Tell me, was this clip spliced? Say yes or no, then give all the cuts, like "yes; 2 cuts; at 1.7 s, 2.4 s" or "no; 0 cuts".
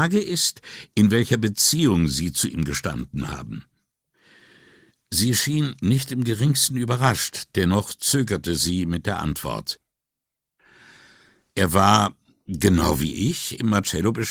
no; 0 cuts